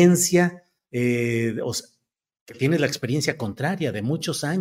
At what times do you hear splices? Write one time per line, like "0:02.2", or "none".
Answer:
none